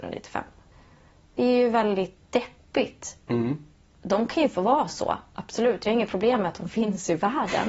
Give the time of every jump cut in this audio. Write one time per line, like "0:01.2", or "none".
0:02.2